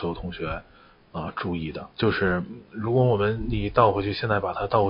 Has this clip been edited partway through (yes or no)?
yes